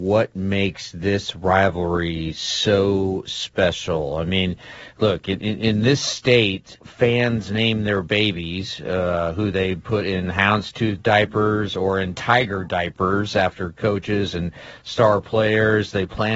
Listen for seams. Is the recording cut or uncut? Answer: cut